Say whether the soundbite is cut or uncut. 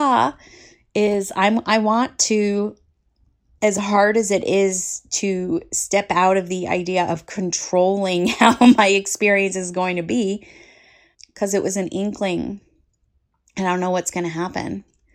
cut